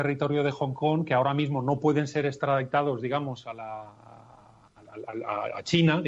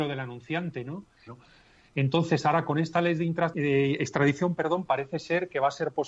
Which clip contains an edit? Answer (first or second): second